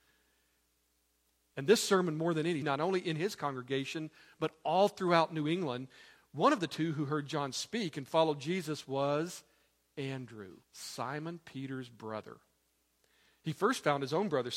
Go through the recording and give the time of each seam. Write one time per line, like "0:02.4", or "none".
0:02.6
0:06.2
0:10.6